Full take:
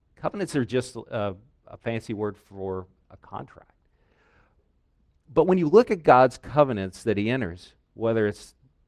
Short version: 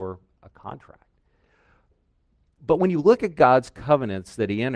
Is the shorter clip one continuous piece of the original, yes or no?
yes